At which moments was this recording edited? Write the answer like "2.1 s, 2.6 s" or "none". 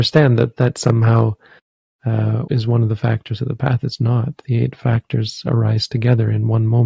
2.5 s